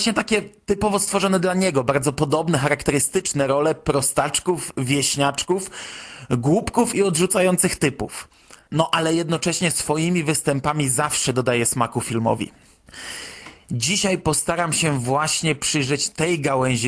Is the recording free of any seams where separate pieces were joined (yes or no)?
yes